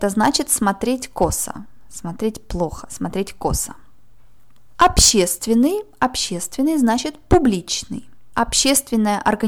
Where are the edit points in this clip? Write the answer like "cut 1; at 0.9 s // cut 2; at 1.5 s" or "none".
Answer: none